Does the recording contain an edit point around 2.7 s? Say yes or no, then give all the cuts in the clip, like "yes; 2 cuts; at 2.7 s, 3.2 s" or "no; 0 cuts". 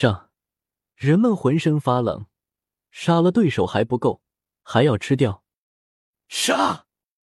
yes; 1 cut; at 2.7 s